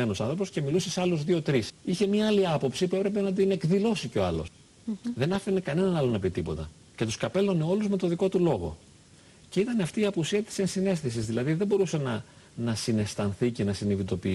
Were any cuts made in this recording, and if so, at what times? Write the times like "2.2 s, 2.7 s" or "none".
1.7 s, 4.5 s